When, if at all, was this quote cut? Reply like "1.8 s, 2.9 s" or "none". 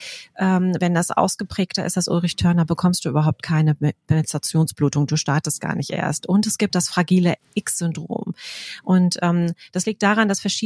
none